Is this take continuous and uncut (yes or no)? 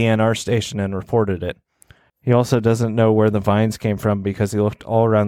no